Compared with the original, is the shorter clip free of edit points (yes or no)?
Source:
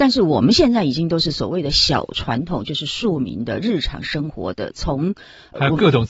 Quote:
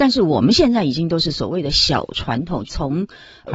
no